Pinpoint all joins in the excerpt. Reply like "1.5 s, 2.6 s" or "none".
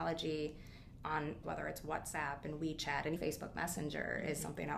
1.4 s, 3.2 s